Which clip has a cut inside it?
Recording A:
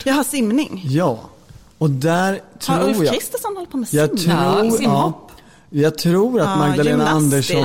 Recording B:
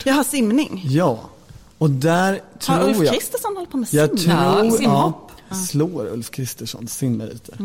B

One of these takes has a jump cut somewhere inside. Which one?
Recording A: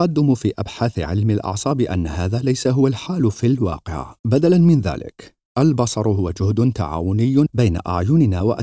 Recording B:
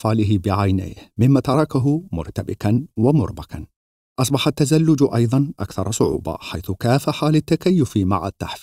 A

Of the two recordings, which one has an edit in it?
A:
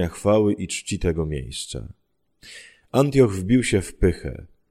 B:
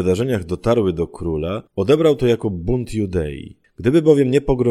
B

